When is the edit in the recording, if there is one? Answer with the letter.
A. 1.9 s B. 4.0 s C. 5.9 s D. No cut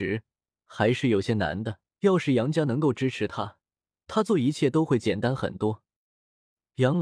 A